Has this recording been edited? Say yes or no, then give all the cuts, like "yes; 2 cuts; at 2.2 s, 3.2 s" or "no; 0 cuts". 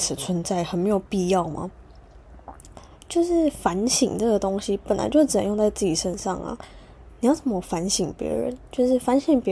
no; 0 cuts